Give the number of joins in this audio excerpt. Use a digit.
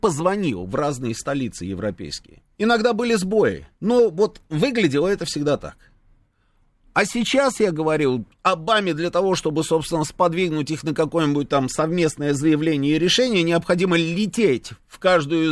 2